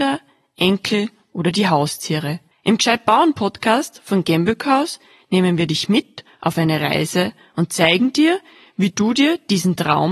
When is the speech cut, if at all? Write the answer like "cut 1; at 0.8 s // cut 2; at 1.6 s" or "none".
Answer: cut 1; at 2.5 s